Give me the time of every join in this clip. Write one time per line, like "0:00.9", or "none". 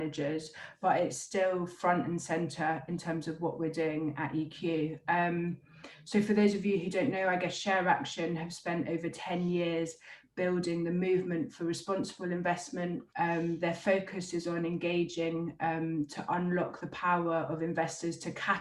0:13.1